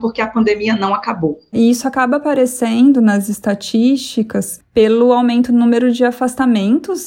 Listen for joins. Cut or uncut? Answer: uncut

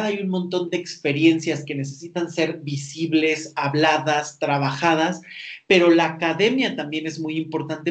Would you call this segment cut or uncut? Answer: uncut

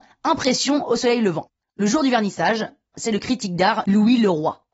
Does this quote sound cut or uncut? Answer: cut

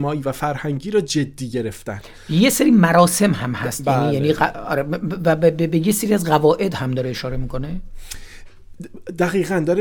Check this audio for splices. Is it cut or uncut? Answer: uncut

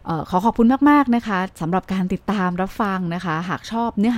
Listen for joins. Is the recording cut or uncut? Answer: cut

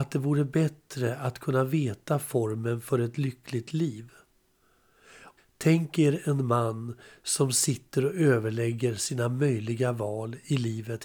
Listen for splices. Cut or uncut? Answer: cut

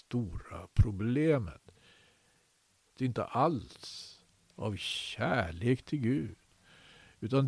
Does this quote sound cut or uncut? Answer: cut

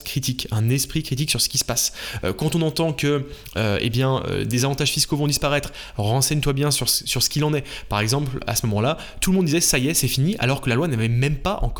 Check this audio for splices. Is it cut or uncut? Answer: uncut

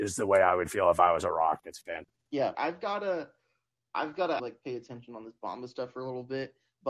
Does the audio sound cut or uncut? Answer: cut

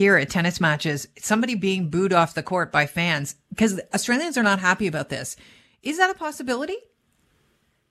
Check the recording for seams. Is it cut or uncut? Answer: uncut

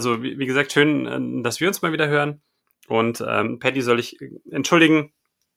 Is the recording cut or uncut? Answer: uncut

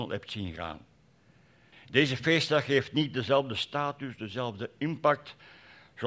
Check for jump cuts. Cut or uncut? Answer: cut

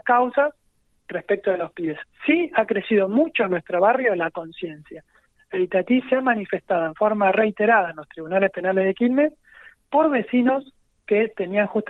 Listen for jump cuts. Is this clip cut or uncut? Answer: uncut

